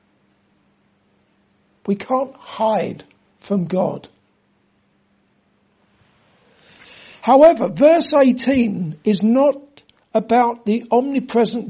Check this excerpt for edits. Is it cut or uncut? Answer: uncut